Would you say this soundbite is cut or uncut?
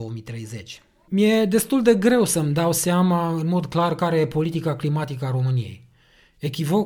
cut